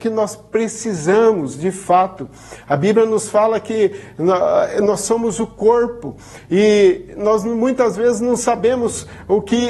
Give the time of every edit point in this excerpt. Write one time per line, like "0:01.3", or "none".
none